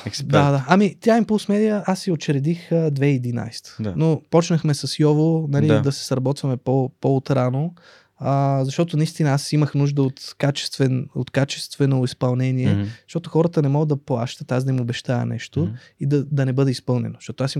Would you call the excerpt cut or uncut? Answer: uncut